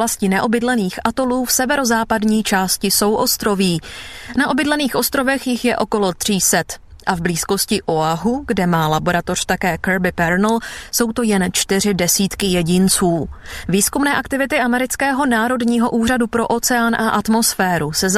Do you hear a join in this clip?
no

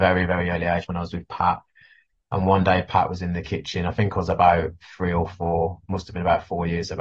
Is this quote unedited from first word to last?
yes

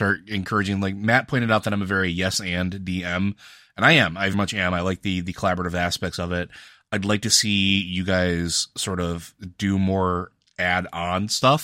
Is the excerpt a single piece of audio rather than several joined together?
no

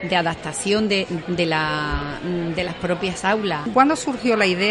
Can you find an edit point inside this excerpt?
yes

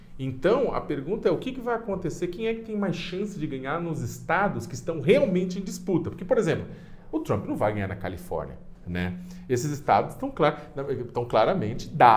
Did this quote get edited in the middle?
yes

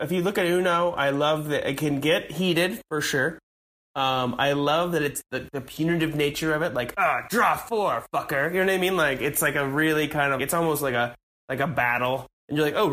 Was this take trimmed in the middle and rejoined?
yes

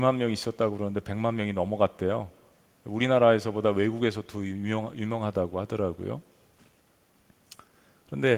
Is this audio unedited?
yes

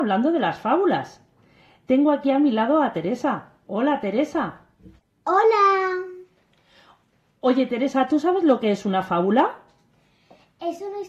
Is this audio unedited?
yes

